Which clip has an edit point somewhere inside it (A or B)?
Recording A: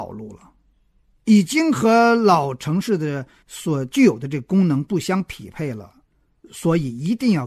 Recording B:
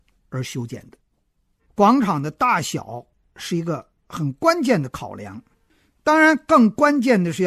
B